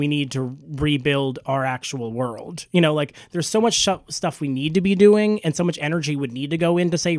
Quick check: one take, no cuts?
yes; 0 cuts

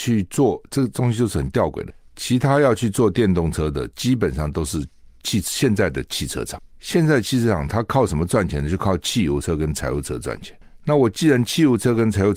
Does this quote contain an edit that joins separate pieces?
no; 0 cuts

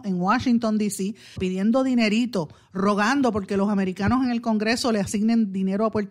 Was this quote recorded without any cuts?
no; 1 cut; at 1.4 s

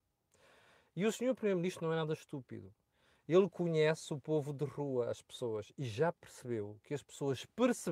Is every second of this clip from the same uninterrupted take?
yes; 0 cuts

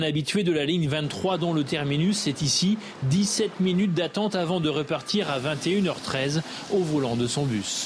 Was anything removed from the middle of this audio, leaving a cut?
no; 0 cuts

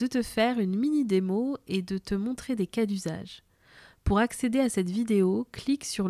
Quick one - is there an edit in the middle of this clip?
no; 0 cuts

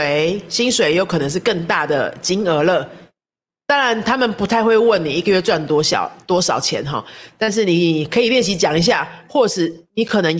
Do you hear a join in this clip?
no; 0 cuts

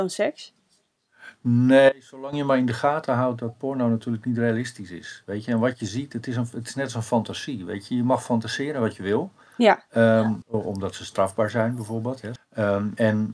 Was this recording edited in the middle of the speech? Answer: yes; 2 cuts; at 10.4 s, 12.4 s

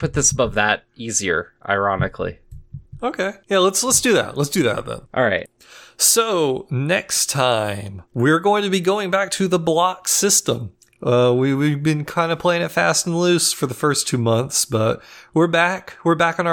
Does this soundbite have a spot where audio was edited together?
no; 0 cuts

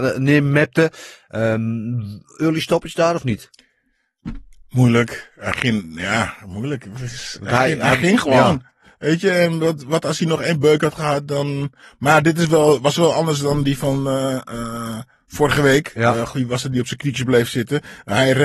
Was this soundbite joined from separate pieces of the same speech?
no; 0 cuts

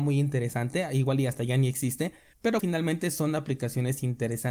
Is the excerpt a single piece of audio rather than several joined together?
no; 1 cut; at 2.6 s

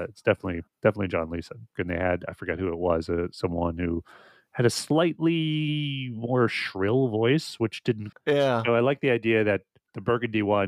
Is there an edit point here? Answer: yes; 2 cuts; at 1.7 s, 8.1 s

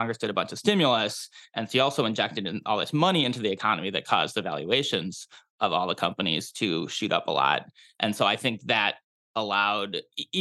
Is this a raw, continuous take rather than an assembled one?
yes; 0 cuts

